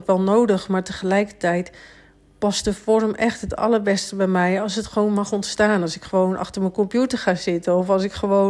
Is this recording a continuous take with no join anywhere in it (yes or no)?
yes